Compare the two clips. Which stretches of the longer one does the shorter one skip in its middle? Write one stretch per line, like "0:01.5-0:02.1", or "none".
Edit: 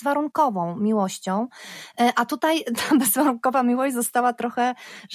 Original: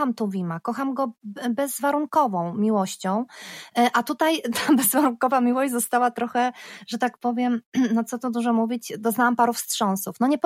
none